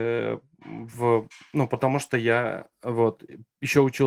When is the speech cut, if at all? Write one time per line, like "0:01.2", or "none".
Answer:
0:02.7